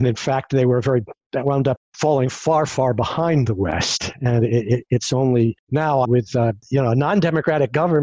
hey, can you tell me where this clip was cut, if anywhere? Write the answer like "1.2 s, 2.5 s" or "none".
6.0 s